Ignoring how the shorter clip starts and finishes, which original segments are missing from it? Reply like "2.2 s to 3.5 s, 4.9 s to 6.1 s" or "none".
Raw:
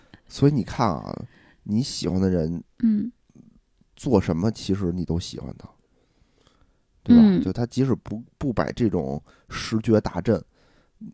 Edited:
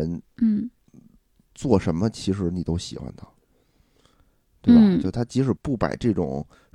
8.0 s to 8.3 s